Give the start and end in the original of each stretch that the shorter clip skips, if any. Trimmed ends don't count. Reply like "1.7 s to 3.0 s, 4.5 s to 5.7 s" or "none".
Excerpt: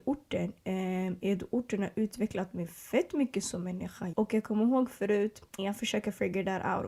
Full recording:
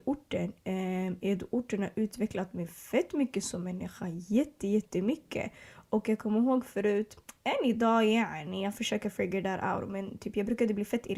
4.1 s to 5.9 s, 7.3 s to 8.6 s